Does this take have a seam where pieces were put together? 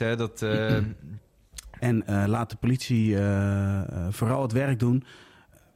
yes; 1 cut; at 1.8 s

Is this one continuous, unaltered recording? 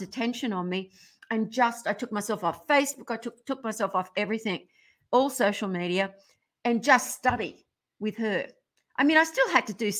yes; 0 cuts

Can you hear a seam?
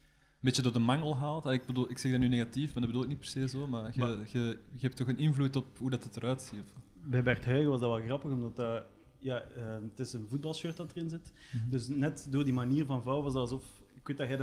no; 0 cuts

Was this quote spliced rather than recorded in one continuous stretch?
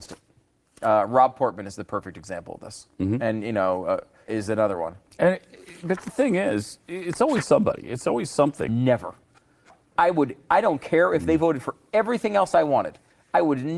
yes; 2 cuts; at 4.3 s, 8.7 s

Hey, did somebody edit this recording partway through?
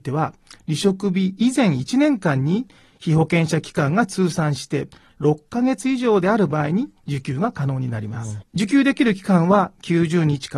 yes; 1 cut; at 8.4 s

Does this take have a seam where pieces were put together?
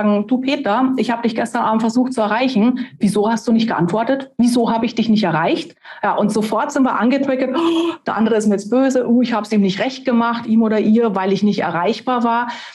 no; 0 cuts

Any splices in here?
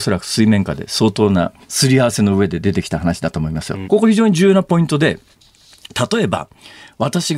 yes; 2 cuts; at 1.6 s, 3.8 s

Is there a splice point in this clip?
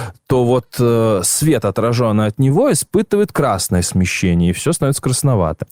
no; 0 cuts

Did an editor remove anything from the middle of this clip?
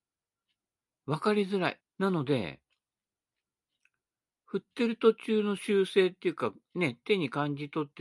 yes; 1 cut; at 1.8 s

